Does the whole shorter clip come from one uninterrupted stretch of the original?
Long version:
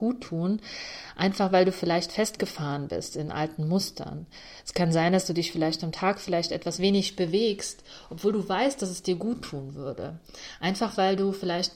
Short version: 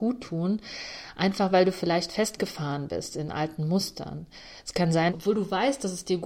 no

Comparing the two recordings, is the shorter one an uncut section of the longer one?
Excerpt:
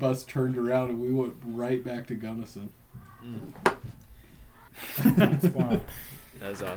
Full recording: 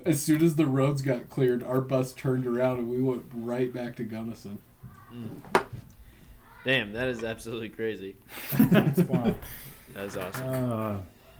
no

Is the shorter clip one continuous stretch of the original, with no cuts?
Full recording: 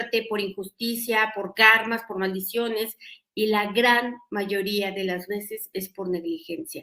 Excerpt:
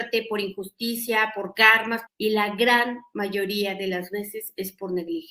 no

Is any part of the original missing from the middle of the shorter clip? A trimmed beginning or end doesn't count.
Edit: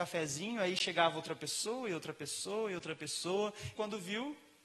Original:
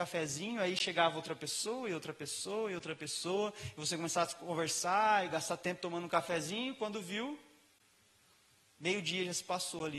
yes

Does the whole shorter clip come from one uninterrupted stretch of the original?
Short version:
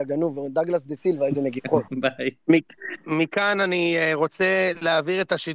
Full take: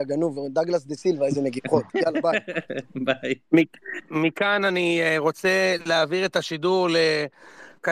no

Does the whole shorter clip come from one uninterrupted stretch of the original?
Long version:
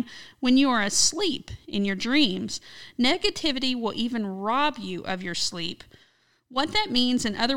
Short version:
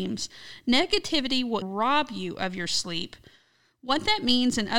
no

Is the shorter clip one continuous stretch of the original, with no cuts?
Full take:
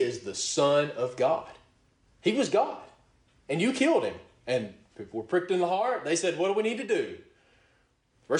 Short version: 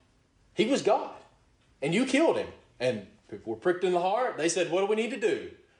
yes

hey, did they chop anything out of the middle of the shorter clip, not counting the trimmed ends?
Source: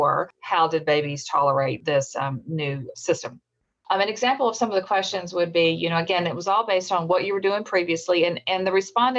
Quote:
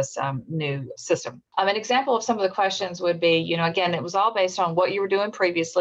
yes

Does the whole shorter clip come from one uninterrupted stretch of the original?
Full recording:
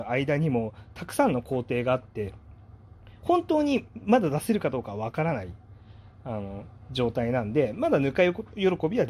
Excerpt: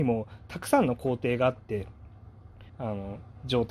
no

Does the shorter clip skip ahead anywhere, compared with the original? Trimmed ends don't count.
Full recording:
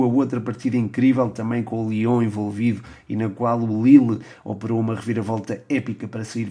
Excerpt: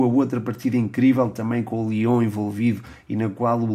no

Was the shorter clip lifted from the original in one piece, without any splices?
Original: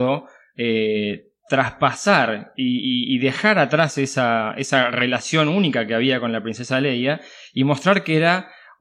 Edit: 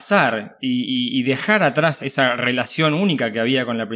no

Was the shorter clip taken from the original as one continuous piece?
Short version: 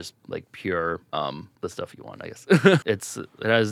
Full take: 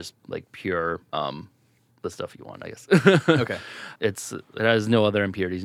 no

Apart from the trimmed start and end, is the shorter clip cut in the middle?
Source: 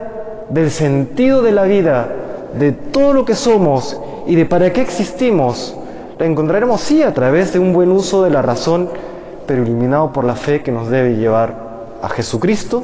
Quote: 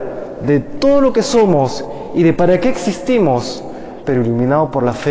yes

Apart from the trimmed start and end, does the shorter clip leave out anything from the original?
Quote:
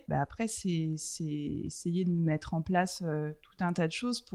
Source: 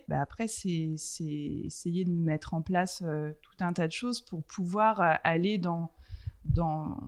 no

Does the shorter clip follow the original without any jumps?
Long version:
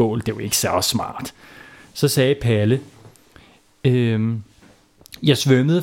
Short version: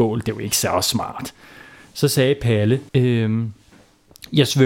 no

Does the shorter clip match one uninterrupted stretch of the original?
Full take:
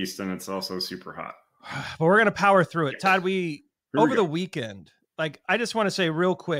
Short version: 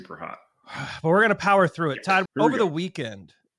no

